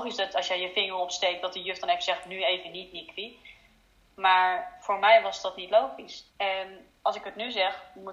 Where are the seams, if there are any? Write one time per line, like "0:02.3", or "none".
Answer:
0:06.3